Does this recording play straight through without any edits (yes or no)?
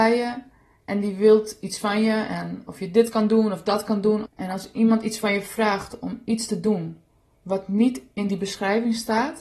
no